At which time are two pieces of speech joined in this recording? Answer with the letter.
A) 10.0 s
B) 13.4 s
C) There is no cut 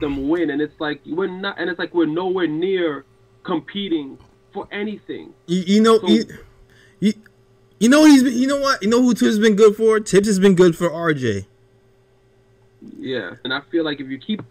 B